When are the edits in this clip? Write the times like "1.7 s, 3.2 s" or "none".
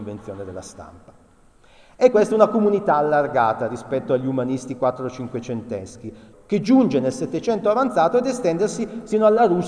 2.1 s, 6.3 s